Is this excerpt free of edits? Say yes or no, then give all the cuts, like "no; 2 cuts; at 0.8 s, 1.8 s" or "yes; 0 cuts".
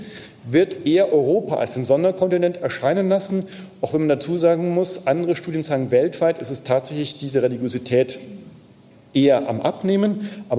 yes; 0 cuts